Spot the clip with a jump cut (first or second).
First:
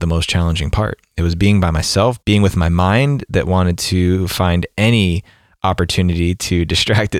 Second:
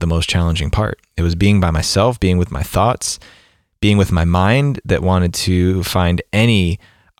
first